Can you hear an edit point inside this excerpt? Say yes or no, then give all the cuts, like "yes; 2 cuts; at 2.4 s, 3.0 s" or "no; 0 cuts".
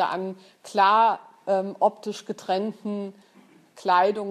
no; 0 cuts